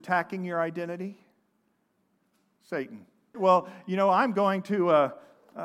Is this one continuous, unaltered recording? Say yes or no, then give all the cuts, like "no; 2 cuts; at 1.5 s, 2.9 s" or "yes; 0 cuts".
no; 1 cut; at 3.3 s